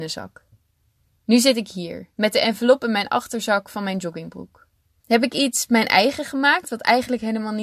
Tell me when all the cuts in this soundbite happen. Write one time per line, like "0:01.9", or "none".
0:02.1
0:05.0